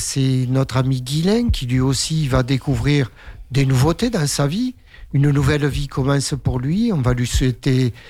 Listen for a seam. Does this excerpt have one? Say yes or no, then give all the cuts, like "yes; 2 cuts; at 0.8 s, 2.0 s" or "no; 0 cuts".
no; 0 cuts